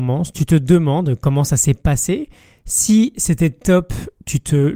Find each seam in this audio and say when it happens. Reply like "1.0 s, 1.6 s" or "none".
none